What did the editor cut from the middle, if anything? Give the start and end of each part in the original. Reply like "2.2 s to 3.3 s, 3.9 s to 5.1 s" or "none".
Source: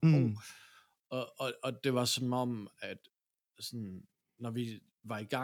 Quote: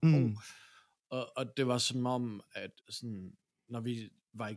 1.3 s to 1.6 s, 3.0 s to 3.5 s